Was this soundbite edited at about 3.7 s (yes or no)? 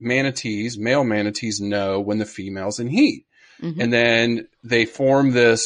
no